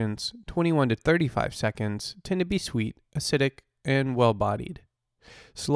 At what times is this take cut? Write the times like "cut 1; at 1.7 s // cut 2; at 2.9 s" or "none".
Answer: none